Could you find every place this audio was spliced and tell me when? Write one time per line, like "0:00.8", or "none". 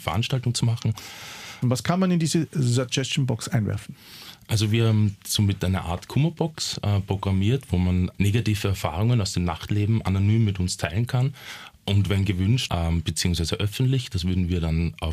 0:01.6
0:08.1
0:12.7